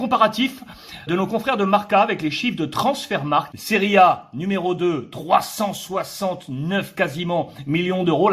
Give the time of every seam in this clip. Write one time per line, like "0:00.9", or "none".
0:01.1
0:03.5